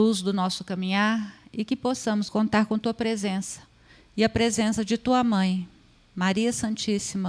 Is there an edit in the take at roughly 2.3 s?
yes; 1 cut; at 2.3 s

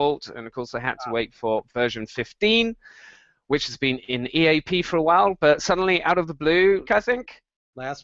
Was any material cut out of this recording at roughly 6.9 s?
yes; 1 cut; at 6.9 s

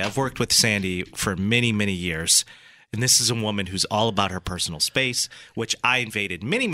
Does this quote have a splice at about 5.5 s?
no; 0 cuts

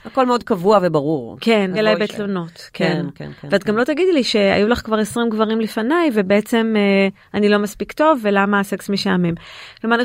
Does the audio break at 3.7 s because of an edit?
no; 1 cut; at 1.8 s

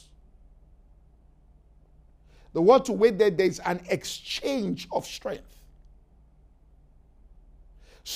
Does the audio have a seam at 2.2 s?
no; 0 cuts

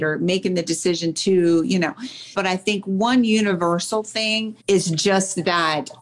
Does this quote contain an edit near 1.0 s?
no; 2 cuts; at 2.3 s, 4.6 s

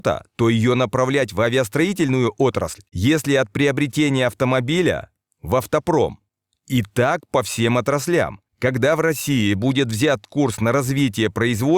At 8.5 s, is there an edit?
yes; 1 cut; at 8.5 s

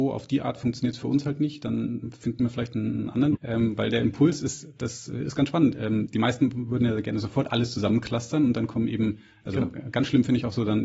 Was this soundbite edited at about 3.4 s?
yes; 1 cut; at 3.4 s

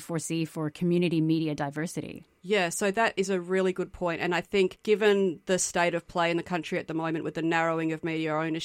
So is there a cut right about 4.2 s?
no; 0 cuts

